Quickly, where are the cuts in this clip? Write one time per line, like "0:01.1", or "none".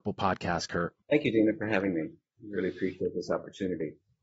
0:01.0